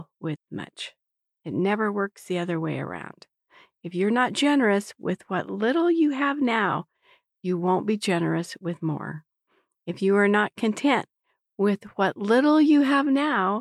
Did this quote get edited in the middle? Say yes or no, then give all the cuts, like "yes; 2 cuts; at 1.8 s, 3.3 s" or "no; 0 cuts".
no; 0 cuts